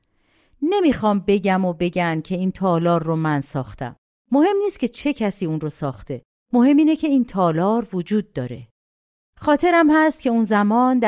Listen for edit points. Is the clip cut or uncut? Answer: uncut